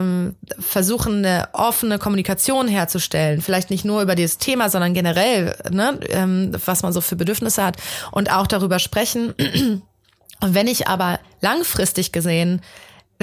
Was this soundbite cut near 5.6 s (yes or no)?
no